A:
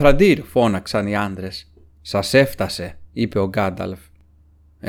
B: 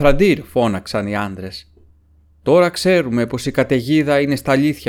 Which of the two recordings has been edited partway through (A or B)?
A